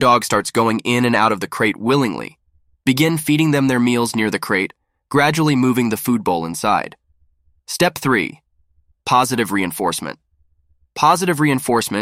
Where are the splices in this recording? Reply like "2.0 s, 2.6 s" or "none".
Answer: 7.6 s